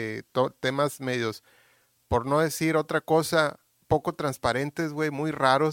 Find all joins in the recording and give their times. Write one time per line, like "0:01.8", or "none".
none